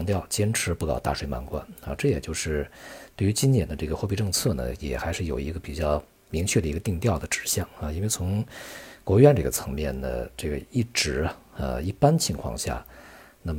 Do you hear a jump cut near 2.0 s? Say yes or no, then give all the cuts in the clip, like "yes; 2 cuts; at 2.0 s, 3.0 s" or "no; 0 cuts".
no; 0 cuts